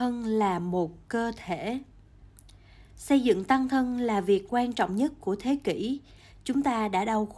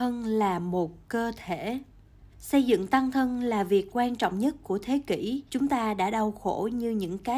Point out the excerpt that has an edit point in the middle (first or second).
second